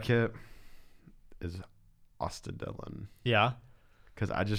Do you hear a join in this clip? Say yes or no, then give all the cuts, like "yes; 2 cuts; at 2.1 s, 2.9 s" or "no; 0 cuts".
no; 0 cuts